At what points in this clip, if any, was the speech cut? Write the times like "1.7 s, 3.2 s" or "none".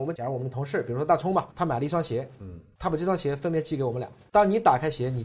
1.5 s